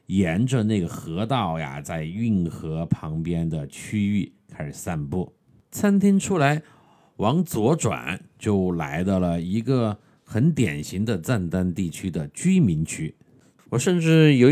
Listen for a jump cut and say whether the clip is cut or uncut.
cut